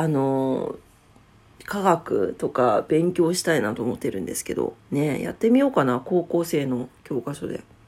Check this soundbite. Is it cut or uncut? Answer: cut